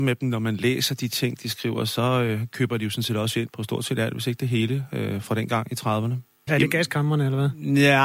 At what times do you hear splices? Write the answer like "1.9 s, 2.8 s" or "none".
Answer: 3.5 s, 6.5 s